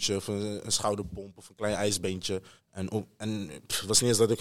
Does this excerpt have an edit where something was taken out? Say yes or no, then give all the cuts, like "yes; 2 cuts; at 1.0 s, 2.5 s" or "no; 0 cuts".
yes; 1 cut; at 2.6 s